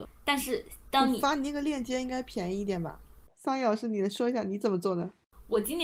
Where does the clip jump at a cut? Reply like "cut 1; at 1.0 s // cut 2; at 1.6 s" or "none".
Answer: cut 1; at 3.3 s